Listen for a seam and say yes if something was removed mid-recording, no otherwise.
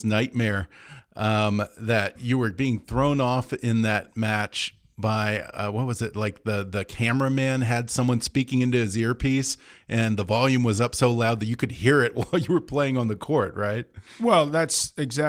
no